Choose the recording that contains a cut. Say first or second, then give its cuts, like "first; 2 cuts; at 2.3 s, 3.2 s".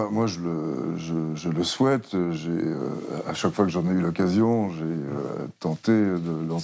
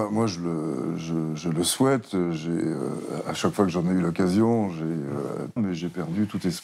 second; 1 cut; at 5.6 s